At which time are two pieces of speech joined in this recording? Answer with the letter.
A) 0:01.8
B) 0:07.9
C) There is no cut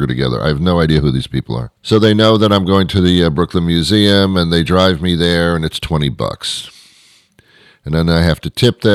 A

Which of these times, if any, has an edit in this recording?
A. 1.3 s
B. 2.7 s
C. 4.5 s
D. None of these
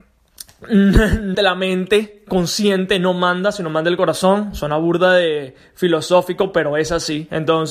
A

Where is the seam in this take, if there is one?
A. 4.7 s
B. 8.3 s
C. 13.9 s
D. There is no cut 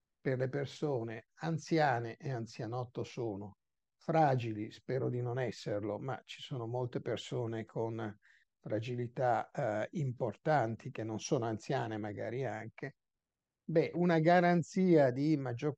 C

